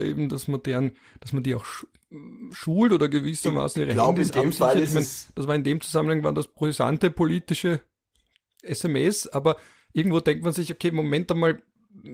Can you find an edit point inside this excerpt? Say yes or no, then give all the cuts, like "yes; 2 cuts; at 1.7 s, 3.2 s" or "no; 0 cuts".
no; 0 cuts